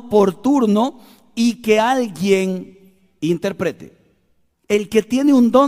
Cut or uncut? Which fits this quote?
cut